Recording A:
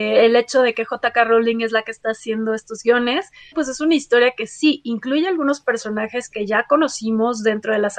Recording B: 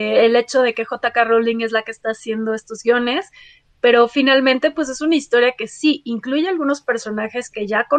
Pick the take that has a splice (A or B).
A